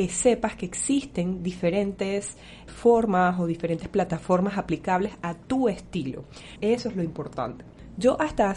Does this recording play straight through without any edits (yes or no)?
no